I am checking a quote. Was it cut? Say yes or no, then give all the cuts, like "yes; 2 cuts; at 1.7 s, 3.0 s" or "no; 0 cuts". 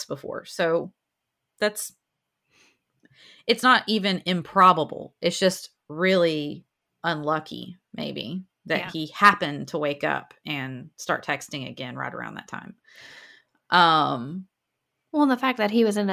no; 0 cuts